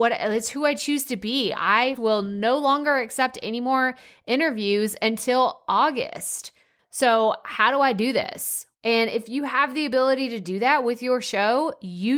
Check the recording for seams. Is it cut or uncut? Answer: cut